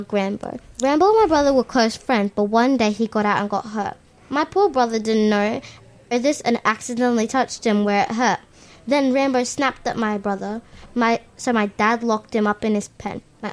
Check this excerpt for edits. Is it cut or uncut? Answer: uncut